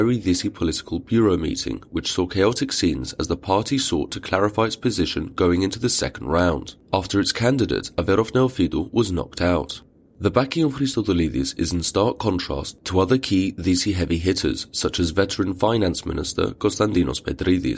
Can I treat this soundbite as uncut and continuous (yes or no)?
yes